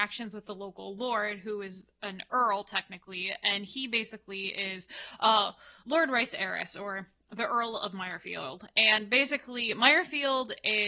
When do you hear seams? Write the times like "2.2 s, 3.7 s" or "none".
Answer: none